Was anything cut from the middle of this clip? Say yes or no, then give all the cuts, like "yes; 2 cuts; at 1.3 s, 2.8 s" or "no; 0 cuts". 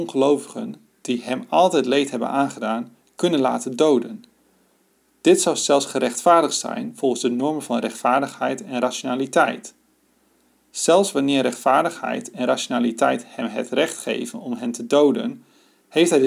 no; 0 cuts